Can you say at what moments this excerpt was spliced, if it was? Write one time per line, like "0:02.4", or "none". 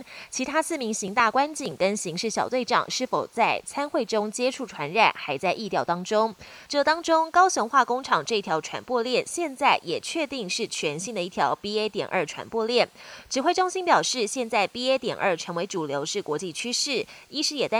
0:06.7